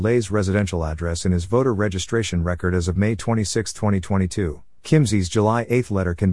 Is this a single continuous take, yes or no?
no